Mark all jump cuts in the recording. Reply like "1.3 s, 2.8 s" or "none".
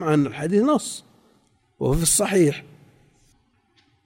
none